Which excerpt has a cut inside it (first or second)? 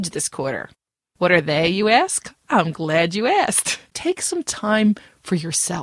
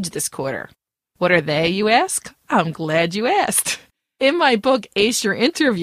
first